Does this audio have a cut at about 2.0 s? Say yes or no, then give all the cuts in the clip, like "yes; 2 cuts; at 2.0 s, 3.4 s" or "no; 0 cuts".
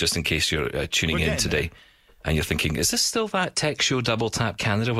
no; 0 cuts